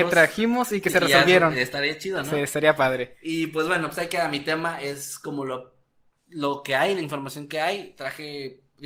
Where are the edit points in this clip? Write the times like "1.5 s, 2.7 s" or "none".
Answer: none